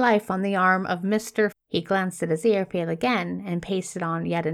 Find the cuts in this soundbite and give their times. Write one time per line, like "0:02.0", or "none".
0:01.5